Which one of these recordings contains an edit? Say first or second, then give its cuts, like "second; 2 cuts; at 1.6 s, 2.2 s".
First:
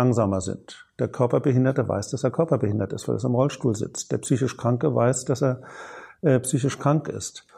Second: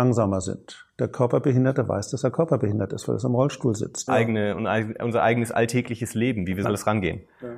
second; 2 cuts; at 4.1 s, 6.6 s